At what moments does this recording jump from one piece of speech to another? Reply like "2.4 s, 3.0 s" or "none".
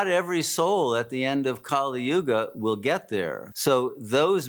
3.5 s